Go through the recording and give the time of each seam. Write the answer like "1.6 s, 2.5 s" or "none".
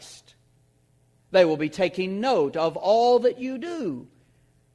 1.2 s